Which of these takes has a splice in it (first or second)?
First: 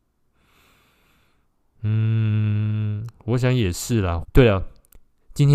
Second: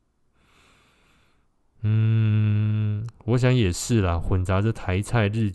first